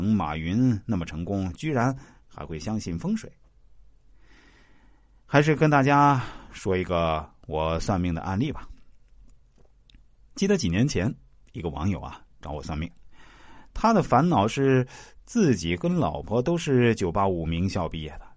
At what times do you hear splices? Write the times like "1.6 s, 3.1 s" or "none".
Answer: none